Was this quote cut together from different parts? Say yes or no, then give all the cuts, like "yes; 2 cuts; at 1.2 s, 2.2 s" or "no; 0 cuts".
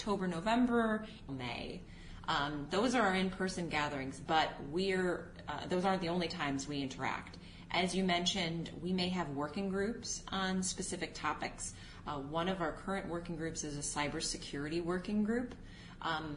yes; 1 cut; at 1.3 s